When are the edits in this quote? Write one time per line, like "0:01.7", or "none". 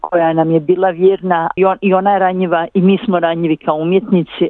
0:01.6

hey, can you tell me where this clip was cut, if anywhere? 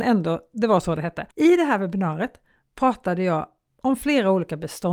0:01.3

